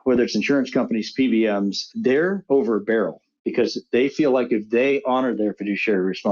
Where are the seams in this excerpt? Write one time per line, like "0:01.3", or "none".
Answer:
0:01.9

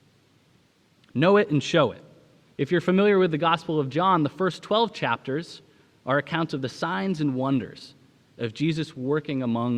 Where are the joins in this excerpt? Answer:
0:02.5

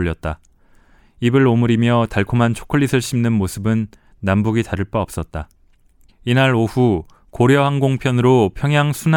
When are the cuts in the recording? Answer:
0:06.1

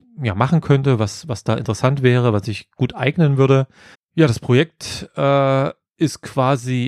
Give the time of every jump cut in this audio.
0:03.9

